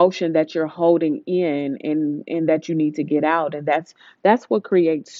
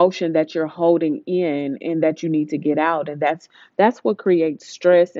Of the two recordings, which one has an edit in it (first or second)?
second